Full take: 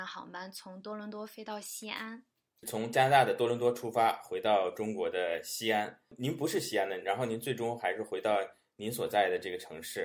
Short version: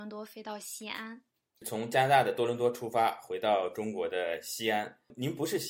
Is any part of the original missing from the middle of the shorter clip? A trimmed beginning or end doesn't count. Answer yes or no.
no